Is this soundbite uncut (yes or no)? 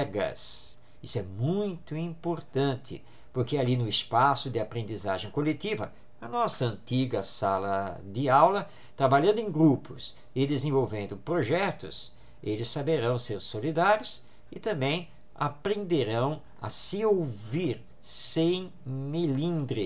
yes